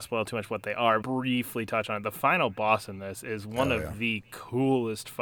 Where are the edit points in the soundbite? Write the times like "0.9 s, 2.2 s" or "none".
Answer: 1.0 s